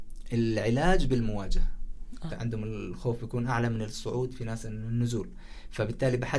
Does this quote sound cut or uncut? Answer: cut